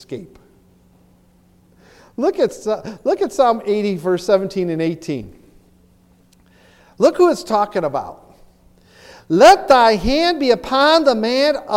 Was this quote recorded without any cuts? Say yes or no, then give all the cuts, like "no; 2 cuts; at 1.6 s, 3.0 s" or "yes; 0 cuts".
yes; 0 cuts